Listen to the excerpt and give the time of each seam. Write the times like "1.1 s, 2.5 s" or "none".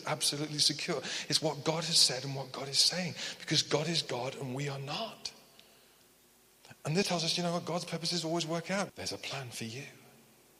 7.0 s, 8.9 s

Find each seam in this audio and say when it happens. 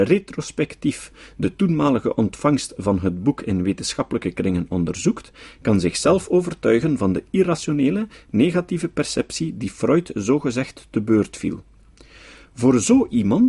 none

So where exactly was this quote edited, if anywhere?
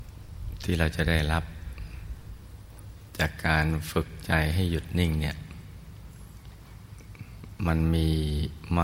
none

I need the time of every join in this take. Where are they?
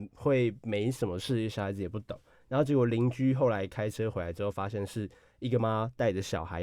5.6 s

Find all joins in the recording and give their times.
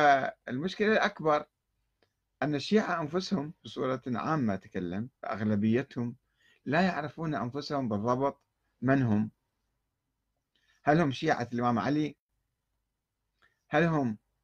3.6 s, 5.1 s

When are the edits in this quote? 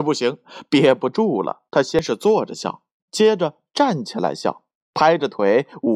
1.7 s, 4.9 s

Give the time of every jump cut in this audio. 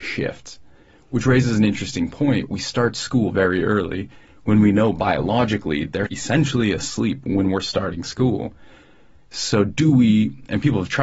6.1 s

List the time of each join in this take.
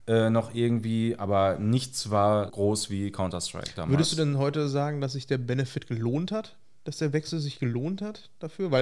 2.5 s

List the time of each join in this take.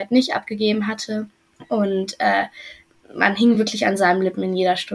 none

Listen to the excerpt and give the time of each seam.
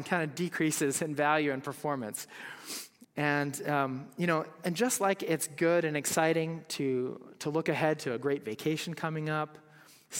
3.0 s

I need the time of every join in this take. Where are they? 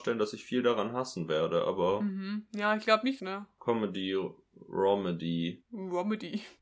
3.2 s

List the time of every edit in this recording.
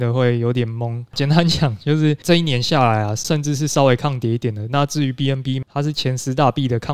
3.2 s, 5.6 s

